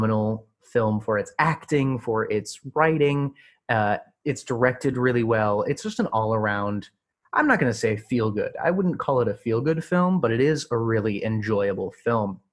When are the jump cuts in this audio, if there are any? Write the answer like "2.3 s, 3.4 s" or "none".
none